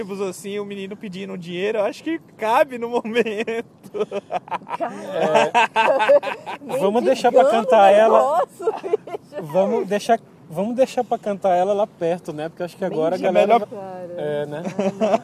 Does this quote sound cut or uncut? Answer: cut